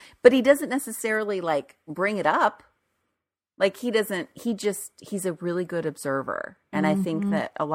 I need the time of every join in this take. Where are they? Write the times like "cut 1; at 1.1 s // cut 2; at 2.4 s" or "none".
none